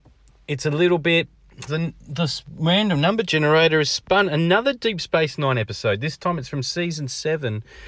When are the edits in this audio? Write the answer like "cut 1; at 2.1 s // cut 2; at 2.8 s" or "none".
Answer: cut 1; at 1.7 s